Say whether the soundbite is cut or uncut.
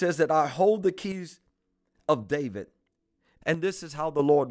cut